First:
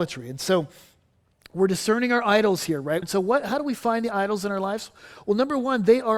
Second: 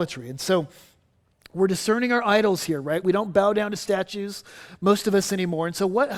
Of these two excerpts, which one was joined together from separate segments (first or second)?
first